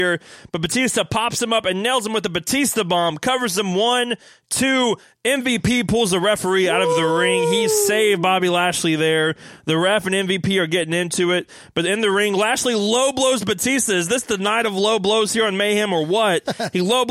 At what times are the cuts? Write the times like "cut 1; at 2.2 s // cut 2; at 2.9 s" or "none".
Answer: none